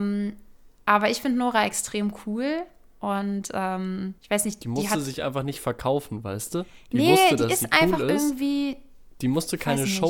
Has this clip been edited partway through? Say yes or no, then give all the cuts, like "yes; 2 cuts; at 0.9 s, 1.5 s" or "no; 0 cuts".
yes; 1 cut; at 4.2 s